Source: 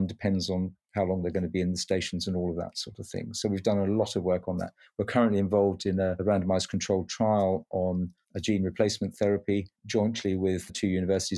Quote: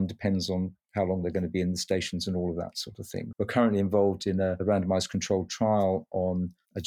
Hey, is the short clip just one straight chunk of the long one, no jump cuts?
no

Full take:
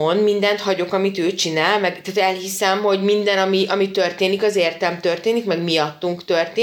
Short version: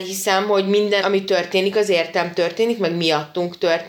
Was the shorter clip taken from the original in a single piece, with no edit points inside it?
no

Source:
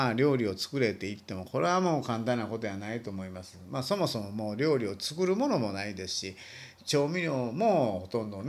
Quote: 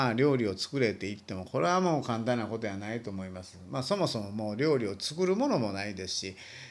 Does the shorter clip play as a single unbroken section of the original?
yes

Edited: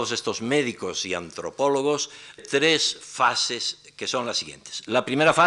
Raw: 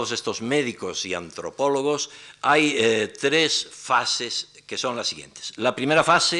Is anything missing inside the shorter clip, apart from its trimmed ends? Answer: yes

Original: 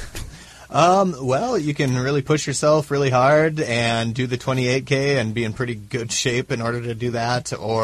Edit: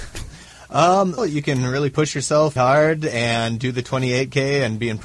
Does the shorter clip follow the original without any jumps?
no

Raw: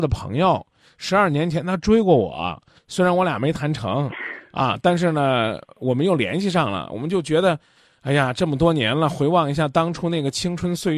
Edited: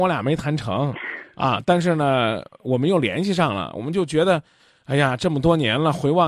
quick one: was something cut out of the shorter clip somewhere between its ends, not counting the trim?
no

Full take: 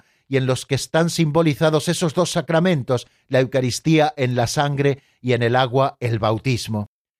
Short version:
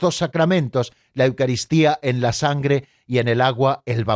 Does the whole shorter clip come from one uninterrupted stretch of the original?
yes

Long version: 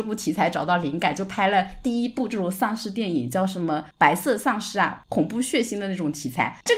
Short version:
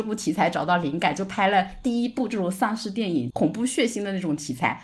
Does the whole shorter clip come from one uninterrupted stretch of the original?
no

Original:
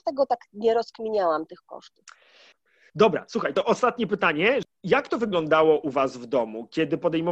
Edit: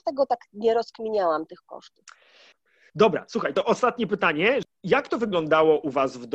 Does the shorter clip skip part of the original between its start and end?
no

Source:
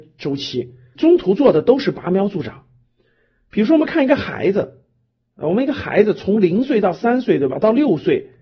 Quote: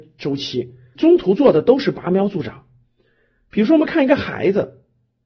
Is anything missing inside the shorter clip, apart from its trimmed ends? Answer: no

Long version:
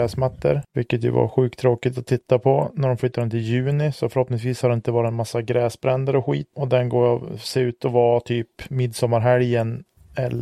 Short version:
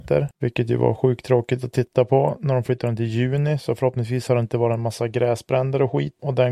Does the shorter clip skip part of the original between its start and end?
no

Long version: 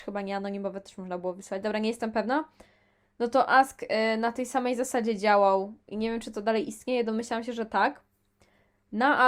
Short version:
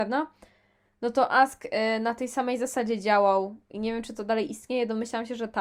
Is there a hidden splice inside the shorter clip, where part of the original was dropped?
no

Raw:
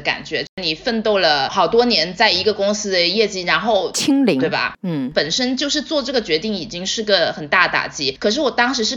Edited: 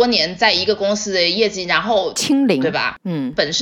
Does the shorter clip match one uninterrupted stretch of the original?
yes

